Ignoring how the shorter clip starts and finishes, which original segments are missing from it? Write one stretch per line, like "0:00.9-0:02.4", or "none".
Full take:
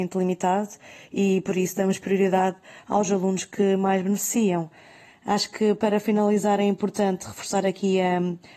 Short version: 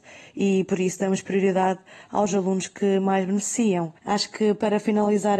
0:04.7-0:05.2